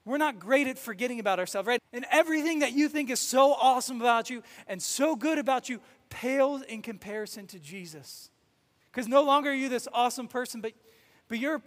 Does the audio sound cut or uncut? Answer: cut